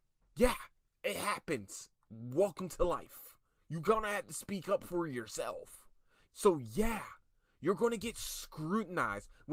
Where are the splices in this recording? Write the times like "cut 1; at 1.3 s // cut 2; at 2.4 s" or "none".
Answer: cut 1; at 3.6 s // cut 2; at 6.3 s